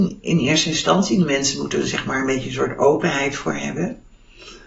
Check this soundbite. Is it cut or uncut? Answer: uncut